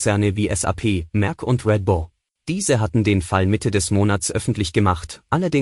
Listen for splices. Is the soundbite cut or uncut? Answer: cut